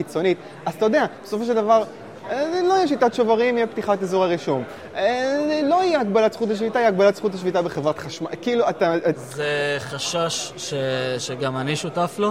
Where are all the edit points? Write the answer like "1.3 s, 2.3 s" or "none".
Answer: none